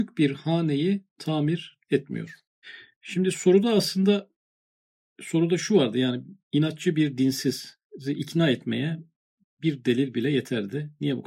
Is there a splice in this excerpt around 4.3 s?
no; 0 cuts

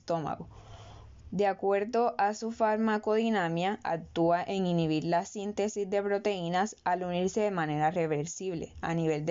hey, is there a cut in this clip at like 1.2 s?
yes; 1 cut; at 1.2 s

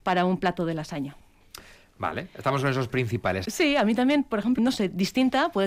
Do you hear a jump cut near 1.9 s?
no; 2 cuts; at 3.4 s, 4.6 s

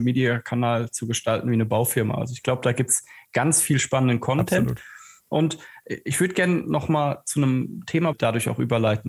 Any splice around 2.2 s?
no; 1 cut; at 8.1 s

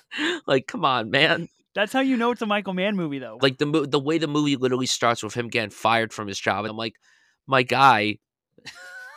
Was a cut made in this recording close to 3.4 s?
yes; 2 cuts; at 3.4 s, 6.7 s

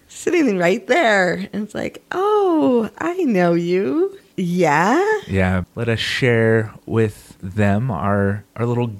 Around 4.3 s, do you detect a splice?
yes; 2 cuts; at 4.3 s, 5.6 s

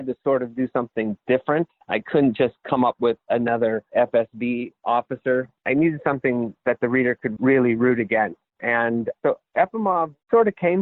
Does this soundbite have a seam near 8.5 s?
no; 0 cuts

